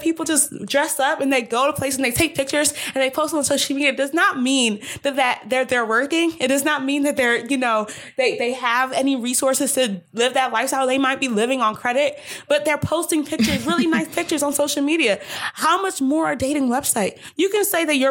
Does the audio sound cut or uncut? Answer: uncut